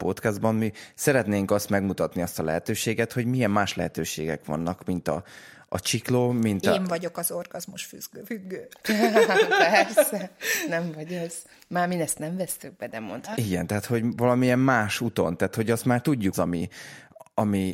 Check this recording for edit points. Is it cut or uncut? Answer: cut